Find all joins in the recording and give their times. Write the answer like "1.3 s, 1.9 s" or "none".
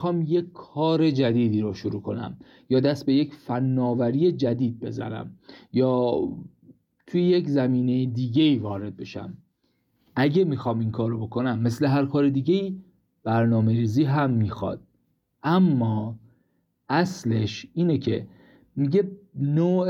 none